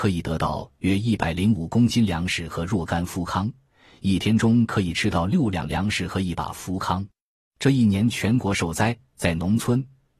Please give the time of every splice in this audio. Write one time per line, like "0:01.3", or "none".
0:07.4